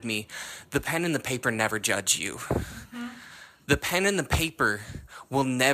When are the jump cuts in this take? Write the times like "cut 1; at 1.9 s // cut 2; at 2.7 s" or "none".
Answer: none